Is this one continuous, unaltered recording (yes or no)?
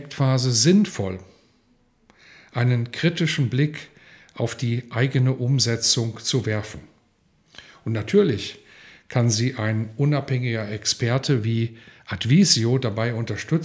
yes